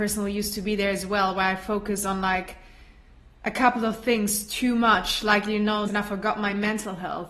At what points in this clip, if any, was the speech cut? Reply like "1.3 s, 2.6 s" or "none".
5.9 s